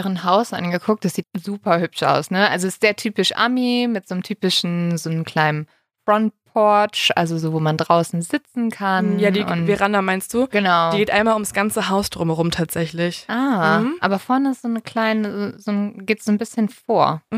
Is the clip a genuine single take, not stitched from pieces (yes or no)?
no